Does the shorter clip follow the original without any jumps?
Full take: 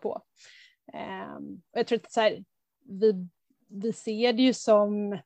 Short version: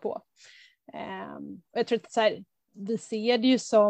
no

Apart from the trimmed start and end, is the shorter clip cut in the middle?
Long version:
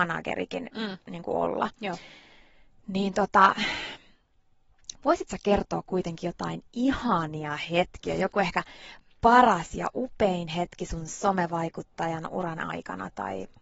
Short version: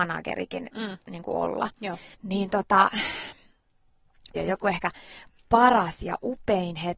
yes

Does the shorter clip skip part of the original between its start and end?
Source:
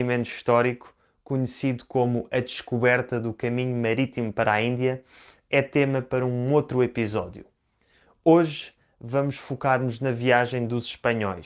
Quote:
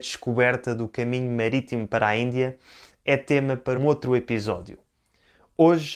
yes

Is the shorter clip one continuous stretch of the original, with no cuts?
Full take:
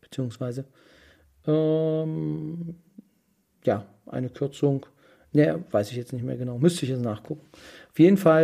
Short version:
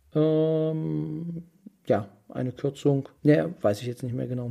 no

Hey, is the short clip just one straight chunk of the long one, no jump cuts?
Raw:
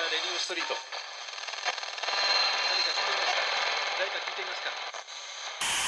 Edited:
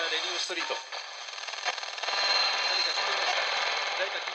yes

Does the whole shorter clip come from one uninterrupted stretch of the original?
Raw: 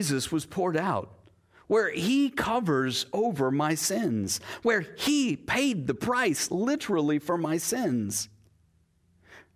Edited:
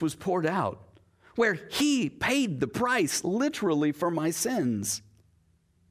no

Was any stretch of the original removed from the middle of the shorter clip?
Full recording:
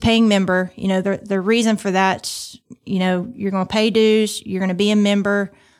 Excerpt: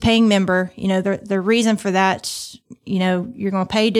no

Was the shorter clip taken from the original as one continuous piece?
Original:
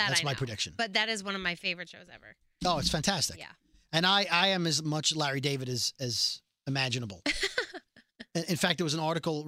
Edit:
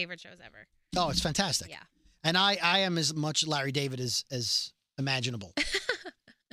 yes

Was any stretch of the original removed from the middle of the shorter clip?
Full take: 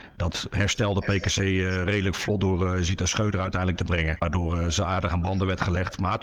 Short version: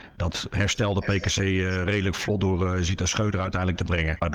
no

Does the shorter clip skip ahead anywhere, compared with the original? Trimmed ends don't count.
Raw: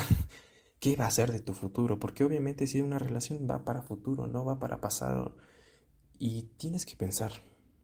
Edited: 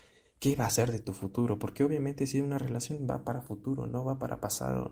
no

